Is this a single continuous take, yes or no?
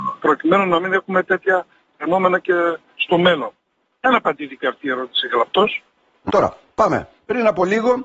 no